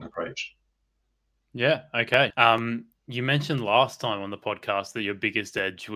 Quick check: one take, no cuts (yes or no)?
no